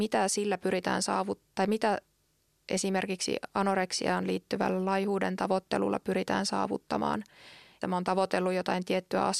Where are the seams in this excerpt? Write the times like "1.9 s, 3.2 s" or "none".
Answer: 7.8 s